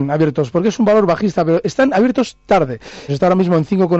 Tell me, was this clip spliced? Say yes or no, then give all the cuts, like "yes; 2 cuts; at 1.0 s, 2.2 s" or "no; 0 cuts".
yes; 1 cut; at 3.1 s